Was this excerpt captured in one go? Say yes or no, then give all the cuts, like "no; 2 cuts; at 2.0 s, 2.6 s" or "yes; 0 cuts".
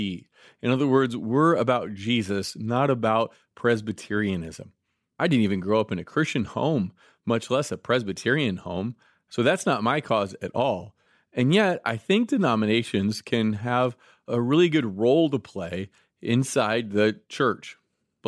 yes; 0 cuts